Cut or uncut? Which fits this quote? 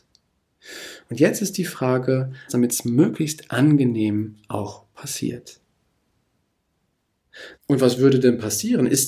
cut